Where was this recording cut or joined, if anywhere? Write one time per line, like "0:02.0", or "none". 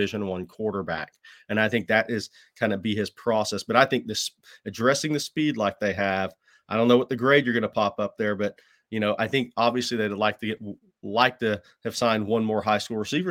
none